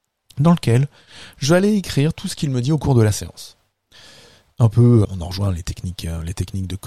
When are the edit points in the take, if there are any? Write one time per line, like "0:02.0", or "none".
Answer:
0:05.0